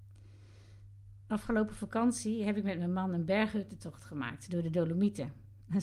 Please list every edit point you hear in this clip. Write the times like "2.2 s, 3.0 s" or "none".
none